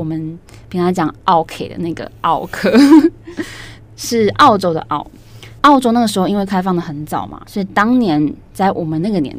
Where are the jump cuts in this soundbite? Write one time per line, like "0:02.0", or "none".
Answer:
0:05.6
0:07.4